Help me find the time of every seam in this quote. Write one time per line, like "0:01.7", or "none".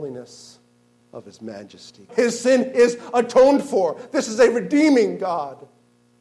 0:01.0
0:02.1